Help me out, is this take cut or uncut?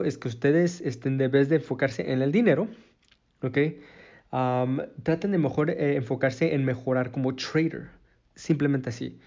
uncut